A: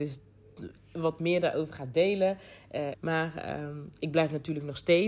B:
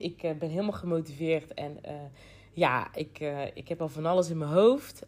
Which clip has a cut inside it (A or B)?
A